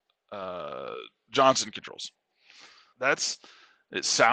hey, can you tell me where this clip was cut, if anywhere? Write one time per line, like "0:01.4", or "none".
0:02.9